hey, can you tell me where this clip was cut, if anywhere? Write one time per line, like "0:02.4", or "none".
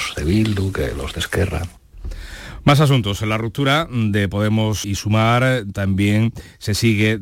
0:04.8